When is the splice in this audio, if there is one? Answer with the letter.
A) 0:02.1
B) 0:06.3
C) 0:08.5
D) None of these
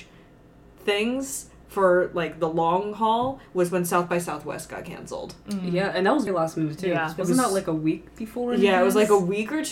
B